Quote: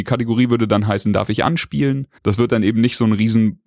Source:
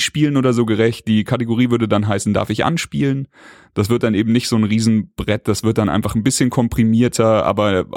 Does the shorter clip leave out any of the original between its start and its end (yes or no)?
yes